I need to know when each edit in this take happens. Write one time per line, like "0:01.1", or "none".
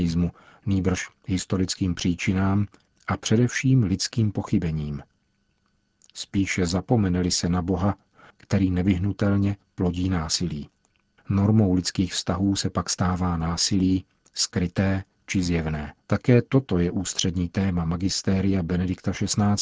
0:08.3
0:11.2
0:16.0